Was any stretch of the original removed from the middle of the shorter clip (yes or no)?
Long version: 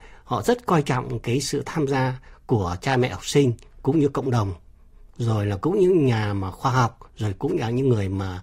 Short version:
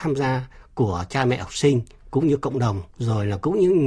yes